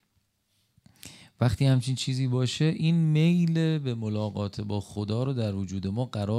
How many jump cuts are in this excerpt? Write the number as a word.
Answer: zero